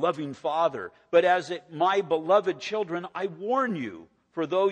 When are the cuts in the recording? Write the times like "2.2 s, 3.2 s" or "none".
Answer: none